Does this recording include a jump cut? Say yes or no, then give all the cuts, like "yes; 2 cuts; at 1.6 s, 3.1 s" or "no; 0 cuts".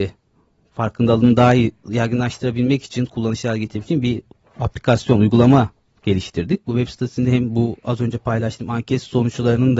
yes; 1 cut; at 6.6 s